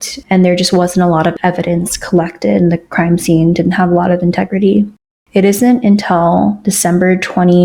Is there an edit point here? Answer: no; 0 cuts

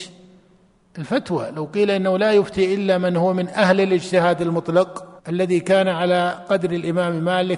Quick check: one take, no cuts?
no; 1 cut; at 5.2 s

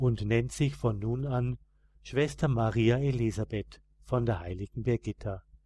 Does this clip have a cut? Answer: no; 0 cuts

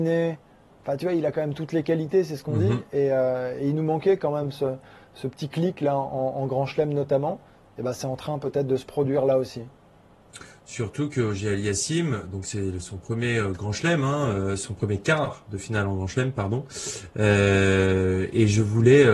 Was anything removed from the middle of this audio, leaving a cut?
no; 0 cuts

